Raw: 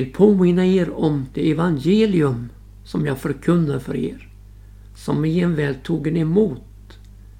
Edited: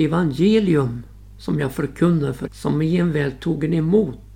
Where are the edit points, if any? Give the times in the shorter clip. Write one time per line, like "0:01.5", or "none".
0:02.5